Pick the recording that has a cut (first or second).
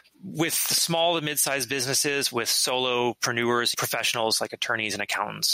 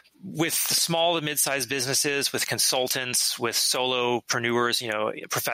first